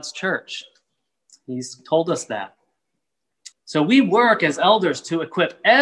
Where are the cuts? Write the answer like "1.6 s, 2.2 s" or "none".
3.5 s